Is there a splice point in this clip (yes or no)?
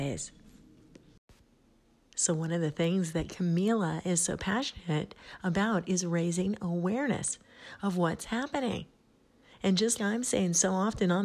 yes